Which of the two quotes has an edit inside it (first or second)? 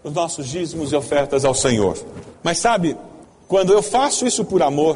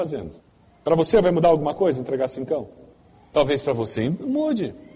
first